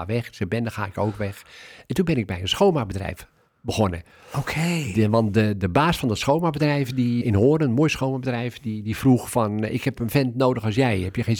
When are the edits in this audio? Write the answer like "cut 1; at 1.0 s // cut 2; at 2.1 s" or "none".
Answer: cut 1; at 7.2 s